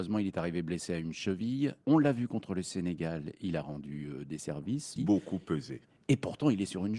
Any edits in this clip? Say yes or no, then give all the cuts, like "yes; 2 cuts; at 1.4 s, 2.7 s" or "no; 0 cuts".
yes; 2 cuts; at 1.8 s, 5.0 s